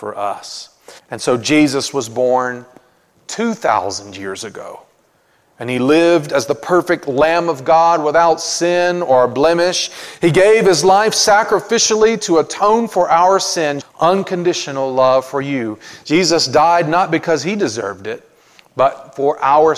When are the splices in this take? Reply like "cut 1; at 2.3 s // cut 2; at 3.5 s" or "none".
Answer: cut 1; at 1.0 s // cut 2; at 13.8 s